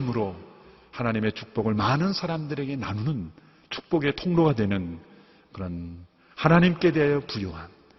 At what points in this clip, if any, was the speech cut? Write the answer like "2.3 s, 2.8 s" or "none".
none